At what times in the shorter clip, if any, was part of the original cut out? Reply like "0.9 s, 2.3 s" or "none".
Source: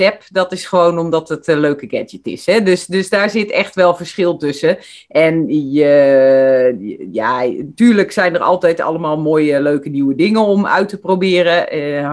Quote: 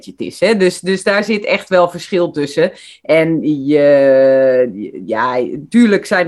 none